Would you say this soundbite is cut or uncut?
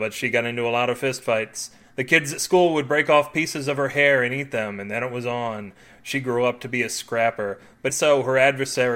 cut